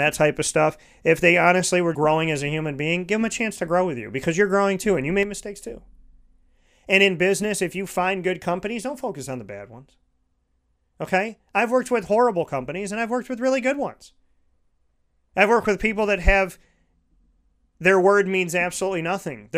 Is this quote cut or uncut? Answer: cut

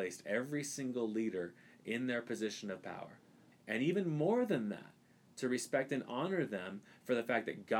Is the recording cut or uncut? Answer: cut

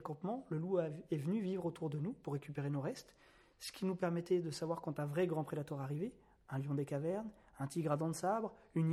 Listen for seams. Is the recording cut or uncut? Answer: uncut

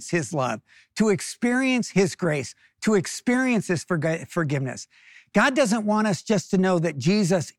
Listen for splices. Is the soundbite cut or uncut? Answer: uncut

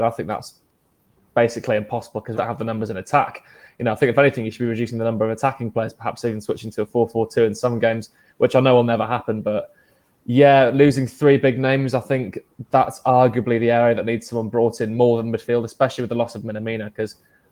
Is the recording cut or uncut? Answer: cut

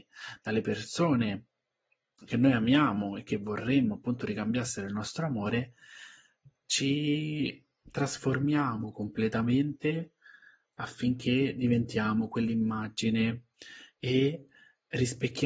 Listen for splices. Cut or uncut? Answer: uncut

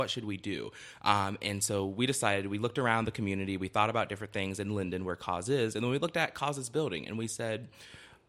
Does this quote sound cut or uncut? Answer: uncut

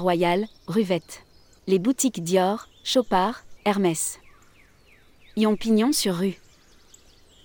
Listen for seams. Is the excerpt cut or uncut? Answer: cut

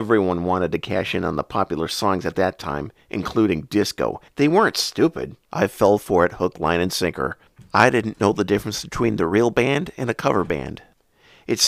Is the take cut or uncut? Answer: cut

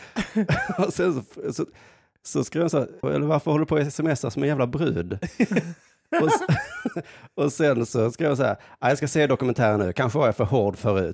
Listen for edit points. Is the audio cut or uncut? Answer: cut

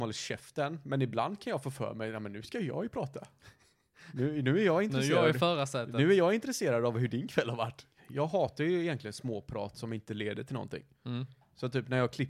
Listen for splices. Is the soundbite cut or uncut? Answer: cut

